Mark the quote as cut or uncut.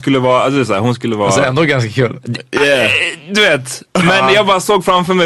uncut